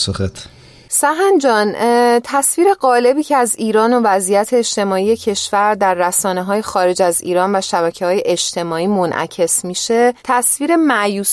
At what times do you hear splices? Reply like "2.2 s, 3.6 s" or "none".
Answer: 10.2 s